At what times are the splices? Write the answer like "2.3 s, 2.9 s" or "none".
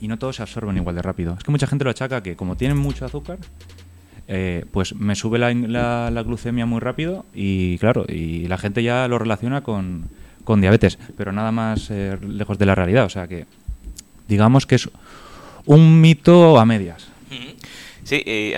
none